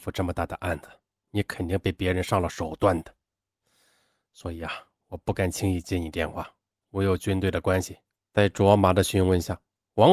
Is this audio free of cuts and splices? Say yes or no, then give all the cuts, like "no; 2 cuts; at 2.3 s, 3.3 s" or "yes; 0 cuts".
no; 1 cut; at 8.2 s